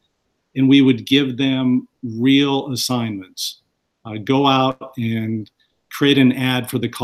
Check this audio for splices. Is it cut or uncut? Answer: uncut